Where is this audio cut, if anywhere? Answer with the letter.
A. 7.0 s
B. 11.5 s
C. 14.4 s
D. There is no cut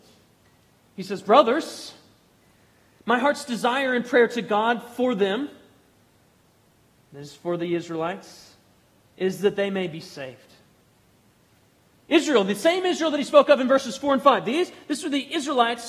D